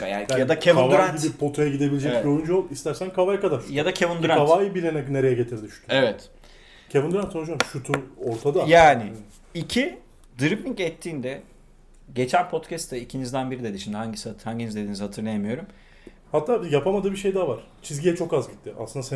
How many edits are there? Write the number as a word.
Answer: two